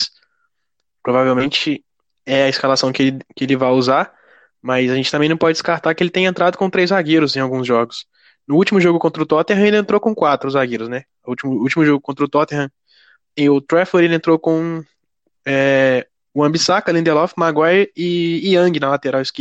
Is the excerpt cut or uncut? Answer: uncut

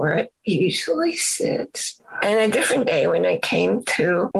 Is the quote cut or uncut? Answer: uncut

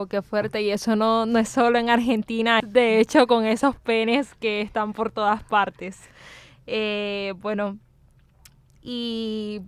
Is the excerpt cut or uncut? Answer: cut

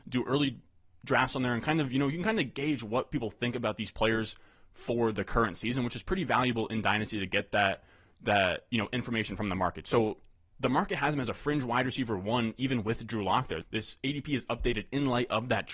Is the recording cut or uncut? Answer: uncut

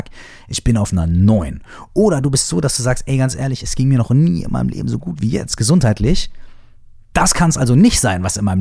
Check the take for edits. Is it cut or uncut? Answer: uncut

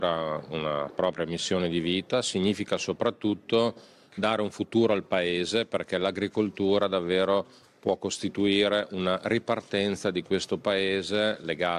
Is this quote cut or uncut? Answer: uncut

